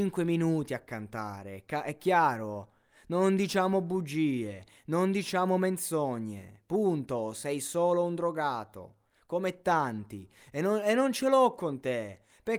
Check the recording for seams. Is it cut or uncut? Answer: uncut